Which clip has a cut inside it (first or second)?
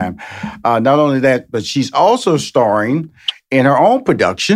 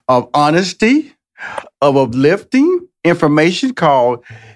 second